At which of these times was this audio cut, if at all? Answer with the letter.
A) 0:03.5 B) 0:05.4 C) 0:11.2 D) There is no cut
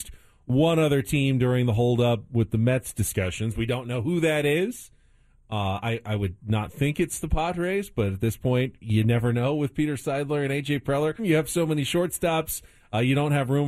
C